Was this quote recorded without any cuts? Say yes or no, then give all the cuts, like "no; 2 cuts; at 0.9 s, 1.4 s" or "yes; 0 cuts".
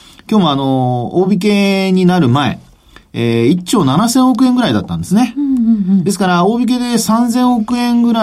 yes; 0 cuts